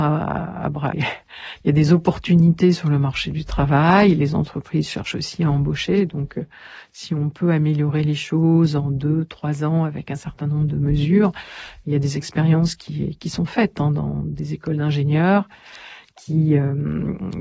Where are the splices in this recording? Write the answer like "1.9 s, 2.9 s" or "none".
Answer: 0.9 s, 4.2 s